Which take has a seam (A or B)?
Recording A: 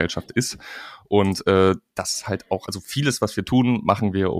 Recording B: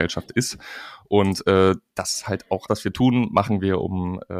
B